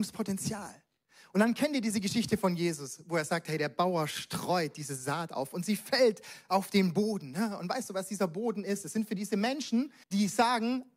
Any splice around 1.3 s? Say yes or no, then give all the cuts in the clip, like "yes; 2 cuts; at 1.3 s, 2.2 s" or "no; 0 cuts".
no; 1 cut; at 10.0 s